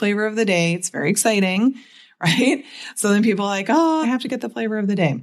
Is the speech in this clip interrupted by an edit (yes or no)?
yes